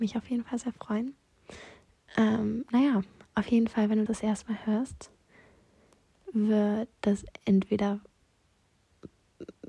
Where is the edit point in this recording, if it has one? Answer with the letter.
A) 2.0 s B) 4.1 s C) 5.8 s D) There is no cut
B